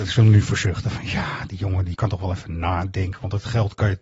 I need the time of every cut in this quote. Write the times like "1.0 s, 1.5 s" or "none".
1.9 s